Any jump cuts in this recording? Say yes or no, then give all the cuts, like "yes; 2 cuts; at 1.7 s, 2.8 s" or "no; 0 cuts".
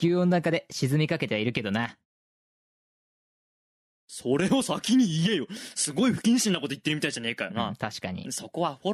no; 0 cuts